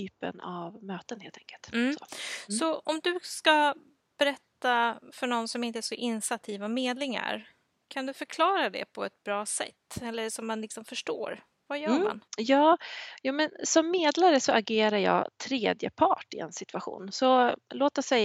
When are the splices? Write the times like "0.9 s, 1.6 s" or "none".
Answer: 12.3 s